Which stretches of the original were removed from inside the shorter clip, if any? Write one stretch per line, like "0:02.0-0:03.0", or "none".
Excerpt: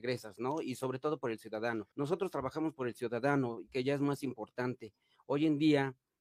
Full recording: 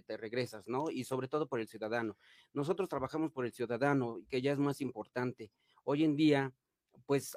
0:02.2-0:02.5